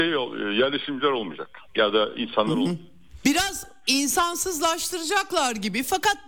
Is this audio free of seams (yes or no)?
no